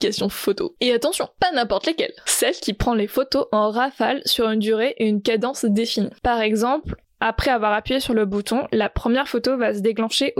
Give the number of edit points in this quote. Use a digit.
0